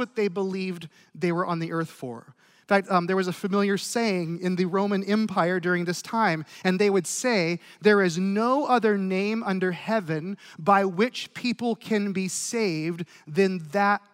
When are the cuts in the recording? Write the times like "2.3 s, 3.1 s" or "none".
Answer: none